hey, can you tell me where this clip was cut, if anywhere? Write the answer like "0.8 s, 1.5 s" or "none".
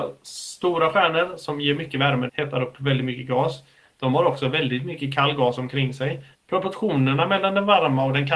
2.3 s, 6.3 s